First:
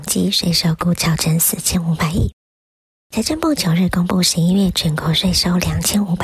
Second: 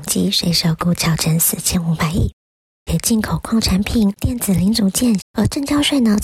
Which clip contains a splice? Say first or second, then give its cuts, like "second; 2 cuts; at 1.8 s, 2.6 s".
second; 3 cuts; at 2.9 s, 4.2 s, 5.2 s